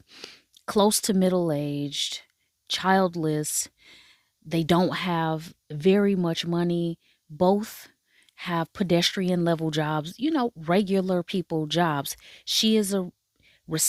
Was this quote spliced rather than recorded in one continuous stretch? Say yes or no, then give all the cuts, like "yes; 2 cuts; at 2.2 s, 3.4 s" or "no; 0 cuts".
no; 0 cuts